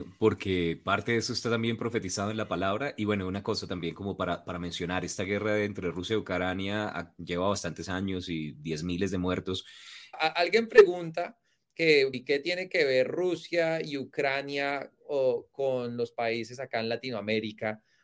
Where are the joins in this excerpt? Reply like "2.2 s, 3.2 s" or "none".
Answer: 10.1 s, 12.1 s